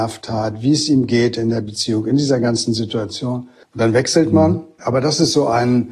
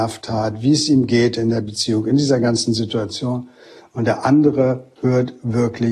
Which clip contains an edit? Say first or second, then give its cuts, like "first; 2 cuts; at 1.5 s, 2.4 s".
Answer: first; 2 cuts; at 3.6 s, 4.8 s